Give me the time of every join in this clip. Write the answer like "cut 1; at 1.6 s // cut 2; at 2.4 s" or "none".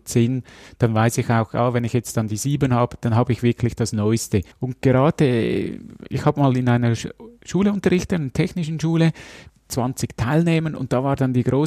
cut 1; at 4.5 s // cut 2; at 9.5 s